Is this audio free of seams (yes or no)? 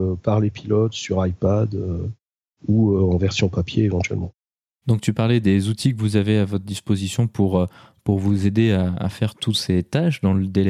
yes